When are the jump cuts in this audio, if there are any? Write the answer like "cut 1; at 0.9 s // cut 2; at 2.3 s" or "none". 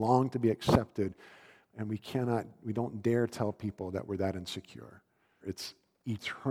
cut 1; at 5.4 s

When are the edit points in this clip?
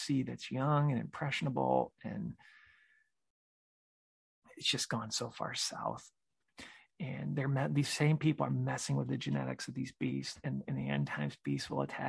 cut 1; at 6.9 s

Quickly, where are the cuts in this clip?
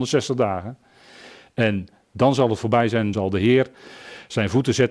cut 1; at 3.1 s

